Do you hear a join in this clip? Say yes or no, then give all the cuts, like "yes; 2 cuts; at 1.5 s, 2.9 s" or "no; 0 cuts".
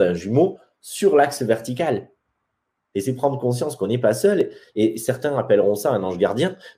yes; 1 cut; at 2.9 s